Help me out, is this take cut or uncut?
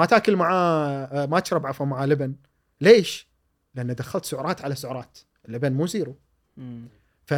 uncut